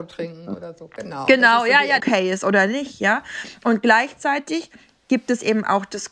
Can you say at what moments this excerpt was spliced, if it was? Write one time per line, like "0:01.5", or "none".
0:02.0